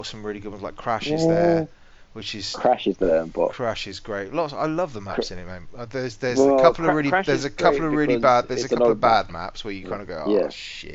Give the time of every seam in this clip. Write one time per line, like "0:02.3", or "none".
none